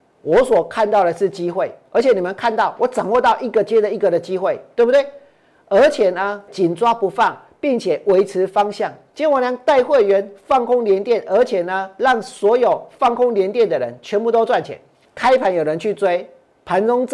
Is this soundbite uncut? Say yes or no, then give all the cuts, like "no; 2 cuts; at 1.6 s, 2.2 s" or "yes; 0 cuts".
no; 3 cuts; at 6.5 s, 9.1 s, 15.0 s